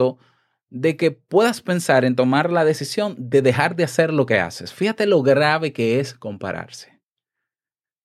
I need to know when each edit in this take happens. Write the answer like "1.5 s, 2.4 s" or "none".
none

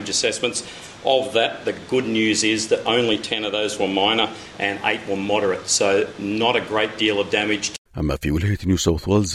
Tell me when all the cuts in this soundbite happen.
7.9 s

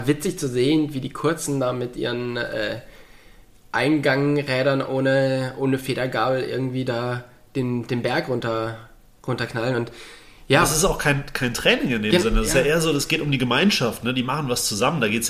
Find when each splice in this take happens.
none

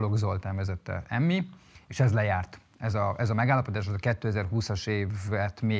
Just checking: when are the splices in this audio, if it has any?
none

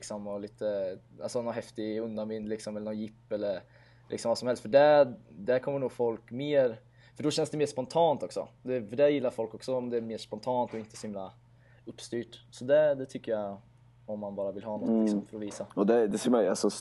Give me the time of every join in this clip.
none

